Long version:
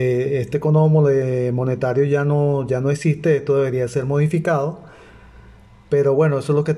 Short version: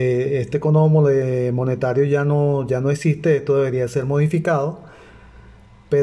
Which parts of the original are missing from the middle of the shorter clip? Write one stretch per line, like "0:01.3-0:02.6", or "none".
none